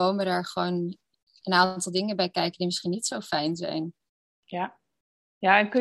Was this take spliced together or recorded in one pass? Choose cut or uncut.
uncut